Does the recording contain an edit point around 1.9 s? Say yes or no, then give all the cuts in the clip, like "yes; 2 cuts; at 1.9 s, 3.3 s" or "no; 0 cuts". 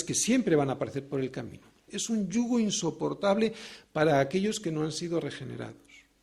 yes; 1 cut; at 1.9 s